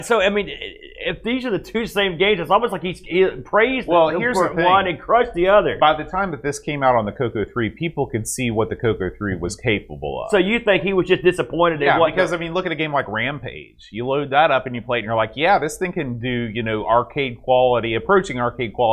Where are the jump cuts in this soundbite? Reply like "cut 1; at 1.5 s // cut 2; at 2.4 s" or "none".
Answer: none